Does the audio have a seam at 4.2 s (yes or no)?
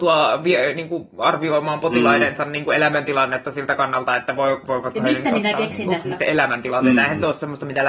no